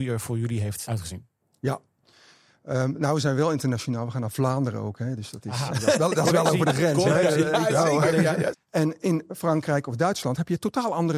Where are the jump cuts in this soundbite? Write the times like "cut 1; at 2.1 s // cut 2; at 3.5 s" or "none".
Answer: cut 1; at 8.5 s